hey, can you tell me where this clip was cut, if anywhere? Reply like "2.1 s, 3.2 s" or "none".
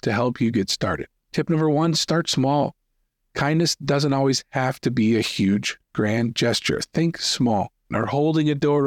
7.9 s